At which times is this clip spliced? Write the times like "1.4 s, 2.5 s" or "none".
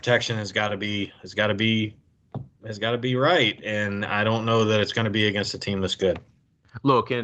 none